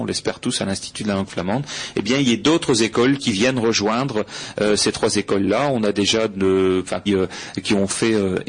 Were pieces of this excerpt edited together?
yes; 1 cut; at 7.1 s

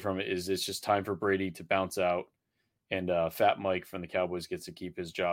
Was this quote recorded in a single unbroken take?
yes; 0 cuts

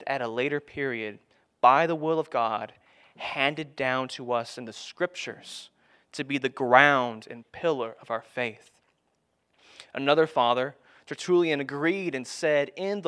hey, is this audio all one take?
yes; 0 cuts

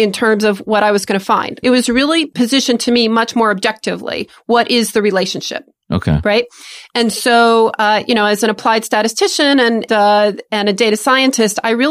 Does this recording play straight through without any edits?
no; 2 cuts; at 1.6 s, 9.9 s

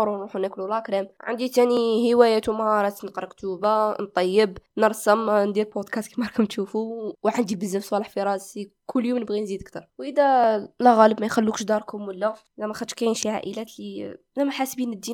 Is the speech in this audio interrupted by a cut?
no; 0 cuts

